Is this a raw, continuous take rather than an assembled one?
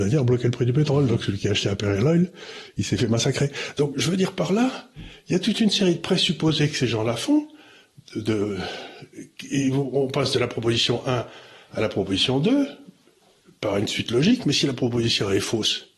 yes; 0 cuts

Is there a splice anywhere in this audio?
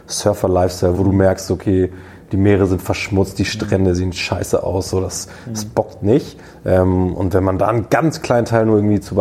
yes; 1 cut; at 0.9 s

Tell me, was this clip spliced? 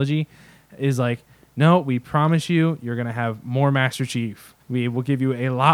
yes; 1 cut; at 4.6 s

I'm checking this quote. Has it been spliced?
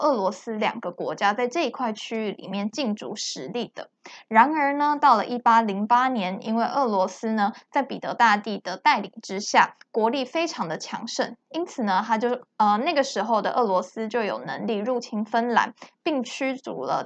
no; 0 cuts

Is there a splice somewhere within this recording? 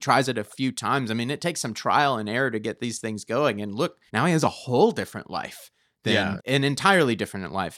yes; 2 cuts; at 4.1 s, 6.4 s

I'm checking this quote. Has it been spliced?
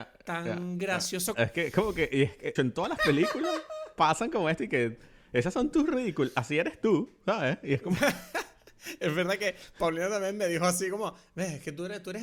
yes; 2 cuts; at 1.3 s, 2.6 s

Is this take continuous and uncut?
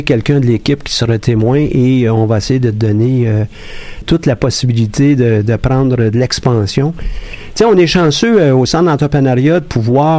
no; 1 cut; at 4.0 s

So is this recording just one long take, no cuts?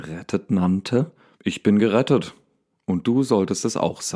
no; 1 cut; at 1.4 s

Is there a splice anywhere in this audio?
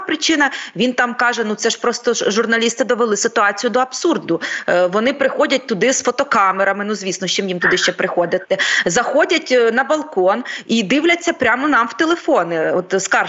no; 0 cuts

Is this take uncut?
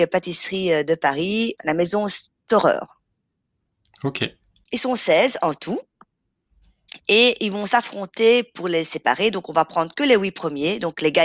yes; 0 cuts

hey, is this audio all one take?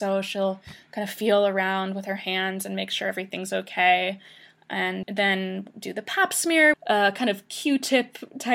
no; 2 cuts; at 5.0 s, 6.7 s

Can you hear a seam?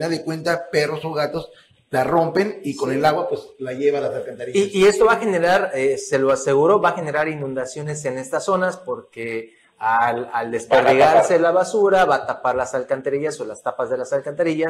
no; 0 cuts

